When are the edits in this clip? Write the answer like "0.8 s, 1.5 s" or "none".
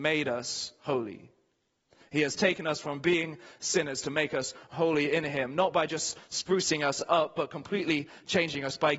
none